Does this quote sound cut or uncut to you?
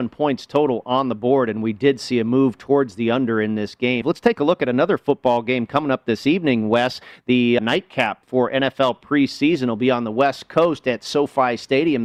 cut